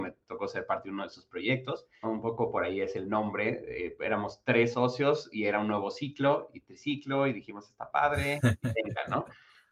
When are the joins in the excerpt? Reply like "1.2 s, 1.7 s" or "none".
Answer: 2.0 s